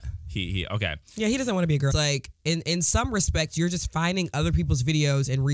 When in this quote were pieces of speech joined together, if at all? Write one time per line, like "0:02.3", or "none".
0:01.9

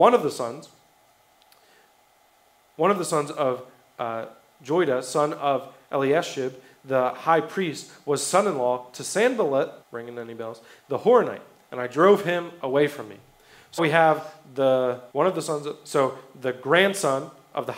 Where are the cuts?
0:09.8
0:13.8
0:15.1

